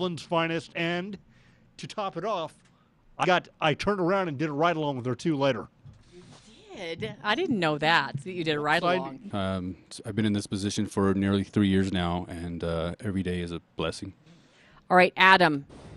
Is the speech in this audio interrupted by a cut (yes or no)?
yes